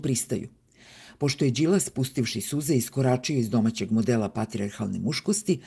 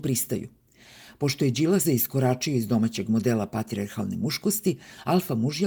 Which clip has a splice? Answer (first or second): second